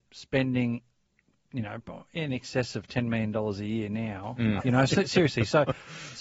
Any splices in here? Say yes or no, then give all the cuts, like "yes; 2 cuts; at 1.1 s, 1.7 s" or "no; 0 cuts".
yes; 1 cut; at 4.6 s